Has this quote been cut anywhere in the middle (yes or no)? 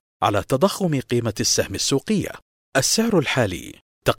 yes